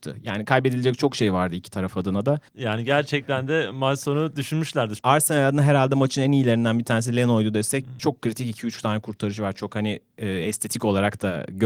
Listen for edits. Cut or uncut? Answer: cut